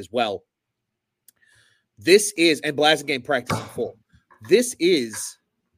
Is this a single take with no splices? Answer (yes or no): yes